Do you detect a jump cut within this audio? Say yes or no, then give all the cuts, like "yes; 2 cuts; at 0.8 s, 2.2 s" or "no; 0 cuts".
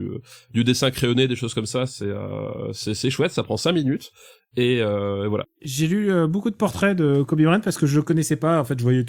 yes; 1 cut; at 5.4 s